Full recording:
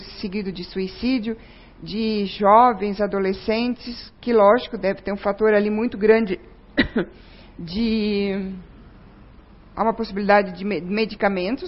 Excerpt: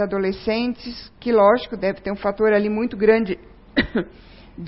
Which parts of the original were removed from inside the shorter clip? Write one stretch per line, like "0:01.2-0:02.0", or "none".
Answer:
none